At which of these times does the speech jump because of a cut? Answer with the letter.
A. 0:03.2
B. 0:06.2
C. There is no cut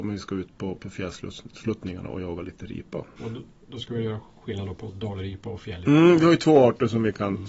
A